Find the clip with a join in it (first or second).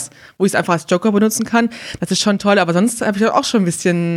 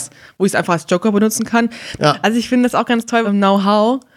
second